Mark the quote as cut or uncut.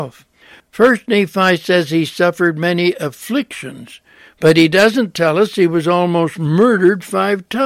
uncut